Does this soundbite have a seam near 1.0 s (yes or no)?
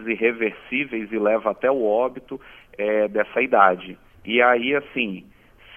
no